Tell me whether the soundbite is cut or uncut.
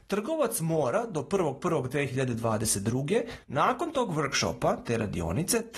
cut